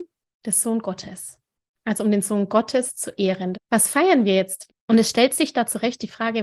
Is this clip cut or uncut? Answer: cut